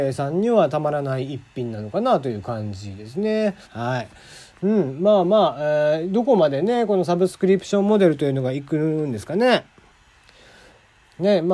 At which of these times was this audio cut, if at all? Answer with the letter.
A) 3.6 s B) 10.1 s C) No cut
A